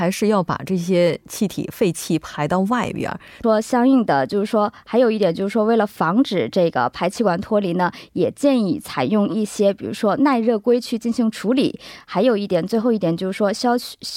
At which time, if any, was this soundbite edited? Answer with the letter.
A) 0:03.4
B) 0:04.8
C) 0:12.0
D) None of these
A